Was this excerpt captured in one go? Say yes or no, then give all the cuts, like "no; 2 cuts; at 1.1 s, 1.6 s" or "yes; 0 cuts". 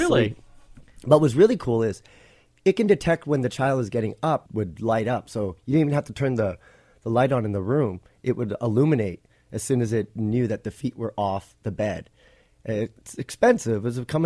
no; 1 cut; at 4.5 s